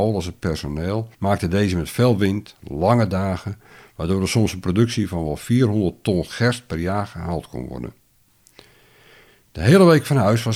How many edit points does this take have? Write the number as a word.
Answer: one